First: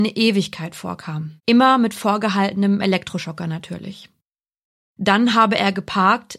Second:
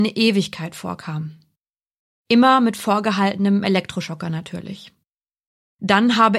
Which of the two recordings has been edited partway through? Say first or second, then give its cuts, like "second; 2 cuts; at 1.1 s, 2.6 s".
first; 1 cut; at 1.4 s